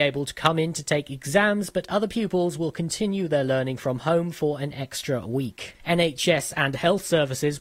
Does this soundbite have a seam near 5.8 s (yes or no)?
yes